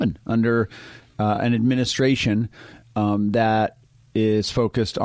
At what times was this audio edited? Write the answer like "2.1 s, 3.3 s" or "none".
none

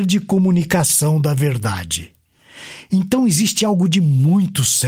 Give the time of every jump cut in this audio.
none

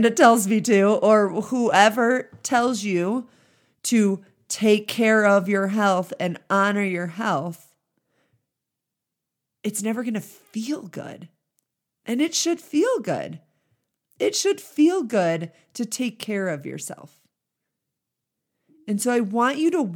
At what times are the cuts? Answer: none

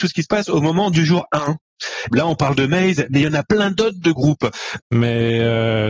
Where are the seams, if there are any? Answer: 2.1 s, 4.8 s

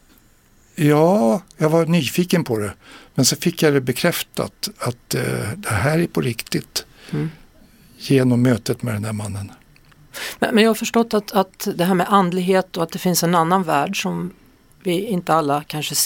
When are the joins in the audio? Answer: none

